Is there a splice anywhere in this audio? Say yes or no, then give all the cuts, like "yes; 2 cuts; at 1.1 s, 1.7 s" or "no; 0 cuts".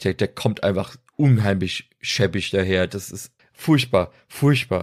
yes; 1 cut; at 3.4 s